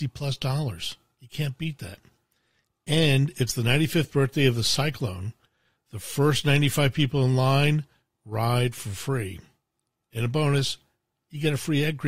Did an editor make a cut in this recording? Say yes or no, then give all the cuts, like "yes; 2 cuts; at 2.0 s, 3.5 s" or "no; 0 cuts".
no; 0 cuts